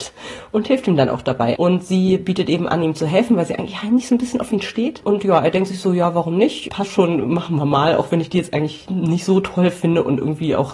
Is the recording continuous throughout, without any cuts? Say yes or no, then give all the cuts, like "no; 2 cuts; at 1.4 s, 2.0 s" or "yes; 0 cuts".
no; 2 cuts; at 1.6 s, 6.7 s